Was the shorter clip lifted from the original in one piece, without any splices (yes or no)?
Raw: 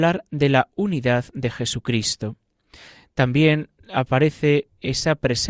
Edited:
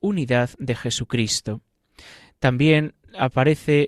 yes